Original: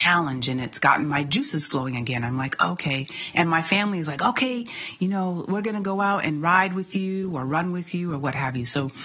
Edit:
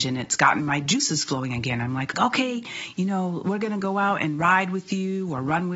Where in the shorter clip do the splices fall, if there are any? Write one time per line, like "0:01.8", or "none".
0:02.1